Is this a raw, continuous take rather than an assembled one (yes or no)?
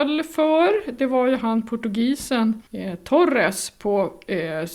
no